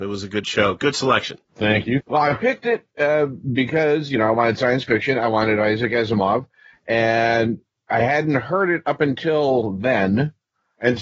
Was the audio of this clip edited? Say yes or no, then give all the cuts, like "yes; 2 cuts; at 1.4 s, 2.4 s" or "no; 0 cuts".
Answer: yes; 1 cut; at 2.0 s